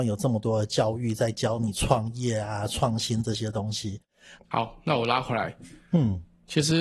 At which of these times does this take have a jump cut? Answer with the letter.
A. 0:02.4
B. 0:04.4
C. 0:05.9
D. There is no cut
B